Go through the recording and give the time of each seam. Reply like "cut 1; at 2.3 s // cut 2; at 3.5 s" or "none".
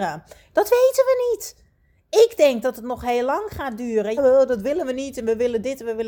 cut 1; at 4.2 s